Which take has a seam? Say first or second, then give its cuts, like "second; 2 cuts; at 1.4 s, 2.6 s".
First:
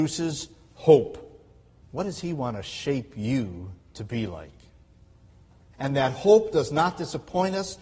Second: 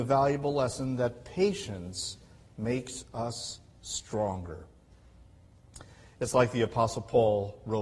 first; 2 cuts; at 1.8 s, 5.7 s